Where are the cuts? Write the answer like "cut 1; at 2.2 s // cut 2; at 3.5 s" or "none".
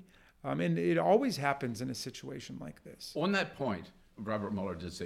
cut 1; at 4.1 s